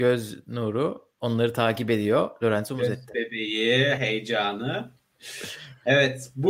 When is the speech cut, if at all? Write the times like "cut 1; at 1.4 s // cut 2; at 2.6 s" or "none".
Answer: cut 1; at 4.0 s